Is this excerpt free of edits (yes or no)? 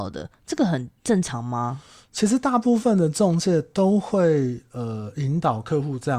yes